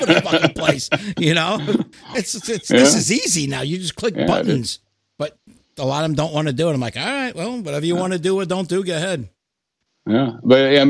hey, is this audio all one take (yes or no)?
yes